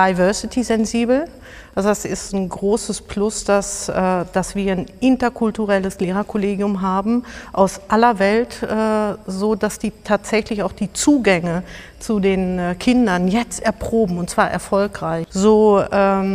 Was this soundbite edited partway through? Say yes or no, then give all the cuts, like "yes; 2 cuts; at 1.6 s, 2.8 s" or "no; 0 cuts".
yes; 1 cut; at 15.3 s